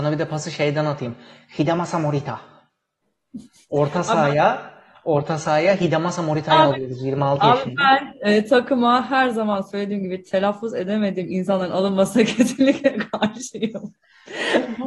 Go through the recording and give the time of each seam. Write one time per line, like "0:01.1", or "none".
none